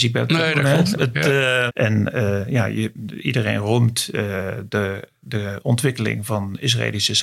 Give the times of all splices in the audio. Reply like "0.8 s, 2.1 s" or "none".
1.7 s